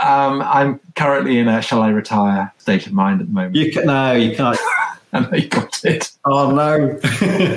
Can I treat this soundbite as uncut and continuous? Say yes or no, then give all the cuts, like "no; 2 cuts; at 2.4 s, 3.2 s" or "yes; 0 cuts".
no; 1 cut; at 4.5 s